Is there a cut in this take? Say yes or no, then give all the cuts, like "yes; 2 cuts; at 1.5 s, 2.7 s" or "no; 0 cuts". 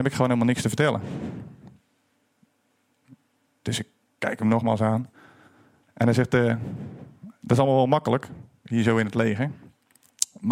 yes; 1 cut; at 3.5 s